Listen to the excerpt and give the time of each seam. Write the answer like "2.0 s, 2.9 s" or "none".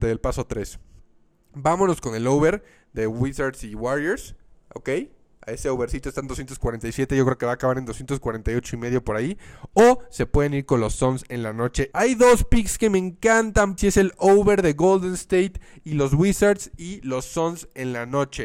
11.9 s, 13.8 s

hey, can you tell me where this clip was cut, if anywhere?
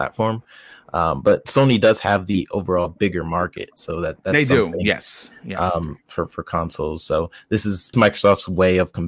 7.9 s

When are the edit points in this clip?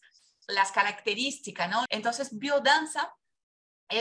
1.9 s

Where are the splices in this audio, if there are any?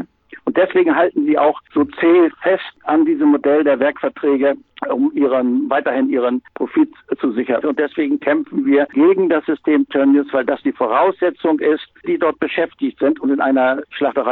7.6 s, 12.0 s

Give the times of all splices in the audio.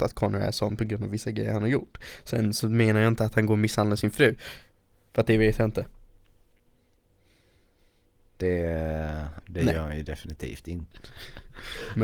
9.4 s, 10.9 s

